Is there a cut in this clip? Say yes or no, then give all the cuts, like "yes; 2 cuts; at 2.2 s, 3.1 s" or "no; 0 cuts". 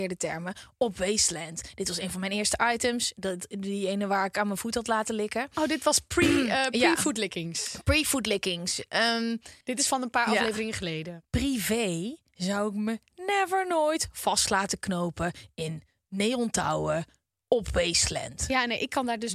yes; 2 cuts; at 9.6 s, 11.2 s